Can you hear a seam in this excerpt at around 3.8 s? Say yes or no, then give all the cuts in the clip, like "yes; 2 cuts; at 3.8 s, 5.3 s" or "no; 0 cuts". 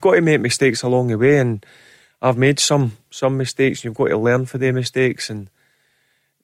no; 0 cuts